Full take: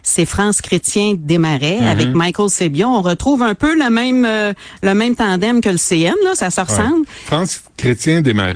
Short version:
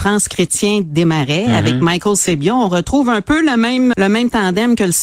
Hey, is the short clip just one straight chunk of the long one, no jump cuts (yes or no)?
no